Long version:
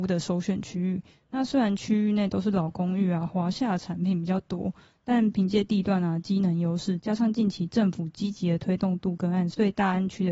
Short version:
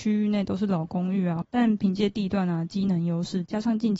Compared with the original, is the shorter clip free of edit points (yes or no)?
no